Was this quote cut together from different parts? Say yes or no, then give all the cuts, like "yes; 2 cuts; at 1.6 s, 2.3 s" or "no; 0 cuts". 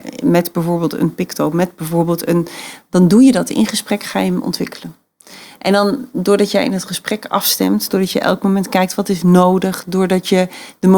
no; 0 cuts